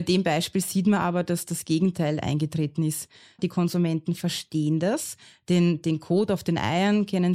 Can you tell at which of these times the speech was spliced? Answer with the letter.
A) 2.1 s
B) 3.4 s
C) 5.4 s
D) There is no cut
B